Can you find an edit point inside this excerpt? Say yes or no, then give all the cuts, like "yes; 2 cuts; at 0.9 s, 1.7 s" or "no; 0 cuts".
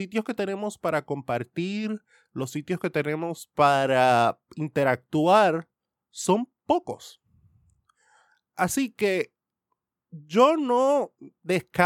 no; 0 cuts